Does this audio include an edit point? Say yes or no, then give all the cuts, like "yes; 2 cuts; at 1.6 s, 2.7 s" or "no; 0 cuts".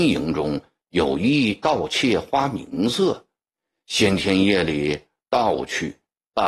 no; 0 cuts